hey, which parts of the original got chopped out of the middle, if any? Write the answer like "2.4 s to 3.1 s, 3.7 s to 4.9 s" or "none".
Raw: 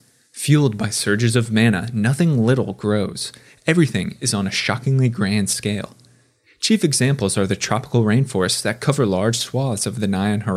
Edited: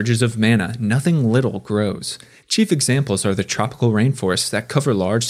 3.6 s to 6.5 s